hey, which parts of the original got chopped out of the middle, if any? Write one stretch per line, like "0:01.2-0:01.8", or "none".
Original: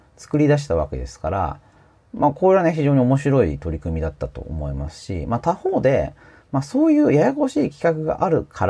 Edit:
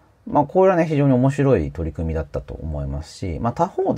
none

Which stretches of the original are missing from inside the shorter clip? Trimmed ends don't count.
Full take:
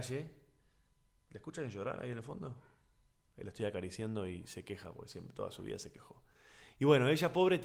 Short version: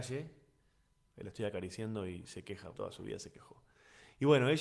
0:01.1-0:03.3
0:04.9-0:05.3

